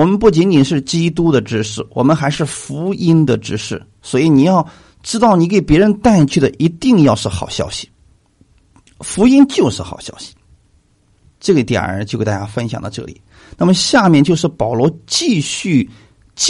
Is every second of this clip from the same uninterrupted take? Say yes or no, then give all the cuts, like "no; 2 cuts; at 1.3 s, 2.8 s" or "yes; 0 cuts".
no; 1 cut; at 11.3 s